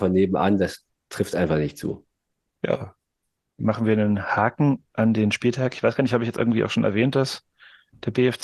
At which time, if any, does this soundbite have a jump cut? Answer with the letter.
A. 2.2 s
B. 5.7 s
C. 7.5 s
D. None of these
D